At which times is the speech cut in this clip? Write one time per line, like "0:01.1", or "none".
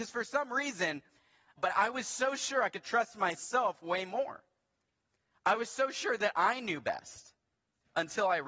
0:01.6